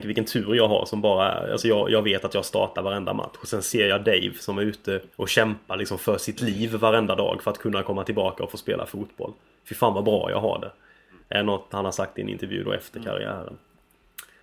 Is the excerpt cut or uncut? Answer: cut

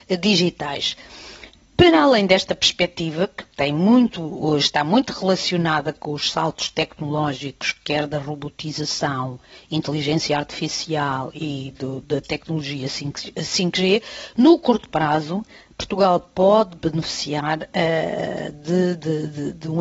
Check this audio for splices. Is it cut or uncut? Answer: uncut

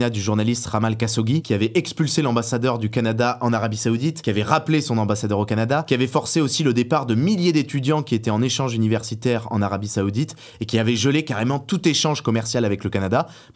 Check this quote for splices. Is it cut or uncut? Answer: cut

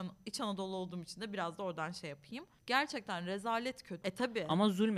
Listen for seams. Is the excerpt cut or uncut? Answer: cut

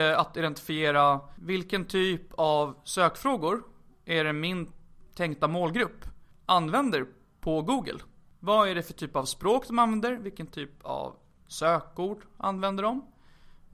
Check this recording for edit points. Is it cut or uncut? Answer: uncut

